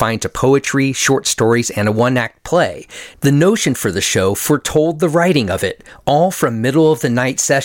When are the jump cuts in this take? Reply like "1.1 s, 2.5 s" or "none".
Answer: 3.1 s